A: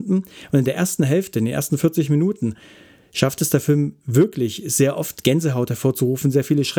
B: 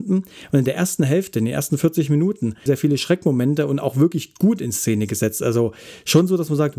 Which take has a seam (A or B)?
B